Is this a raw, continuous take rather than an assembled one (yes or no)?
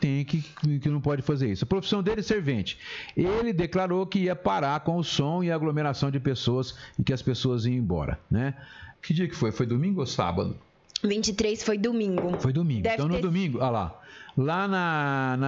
no